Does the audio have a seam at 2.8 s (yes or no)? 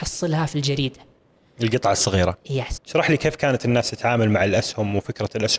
yes